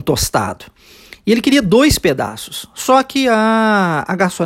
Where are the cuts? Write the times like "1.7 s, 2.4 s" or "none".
none